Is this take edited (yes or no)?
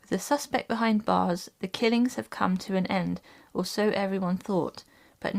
no